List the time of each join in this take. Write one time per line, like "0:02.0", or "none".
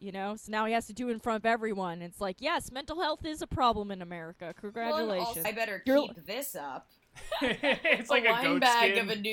0:05.4
0:07.0